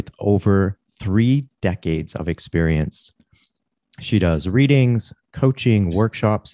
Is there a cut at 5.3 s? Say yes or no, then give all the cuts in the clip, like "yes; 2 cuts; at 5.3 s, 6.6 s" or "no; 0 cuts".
no; 1 cut; at 3.8 s